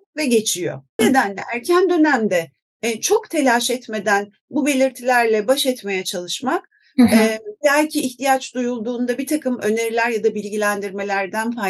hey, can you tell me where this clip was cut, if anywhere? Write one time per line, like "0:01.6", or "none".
0:01.0